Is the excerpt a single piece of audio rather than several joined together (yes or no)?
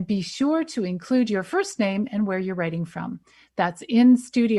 yes